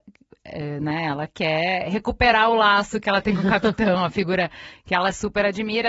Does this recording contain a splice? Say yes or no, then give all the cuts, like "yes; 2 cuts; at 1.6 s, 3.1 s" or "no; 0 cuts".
no; 0 cuts